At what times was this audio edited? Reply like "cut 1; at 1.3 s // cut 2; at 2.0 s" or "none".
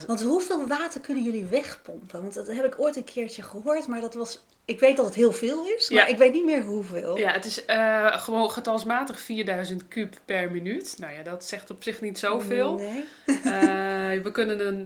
none